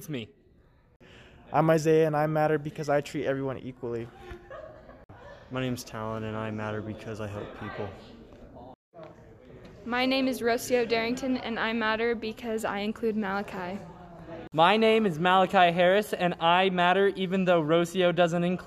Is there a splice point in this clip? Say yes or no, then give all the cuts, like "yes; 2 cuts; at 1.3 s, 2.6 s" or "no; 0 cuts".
no; 0 cuts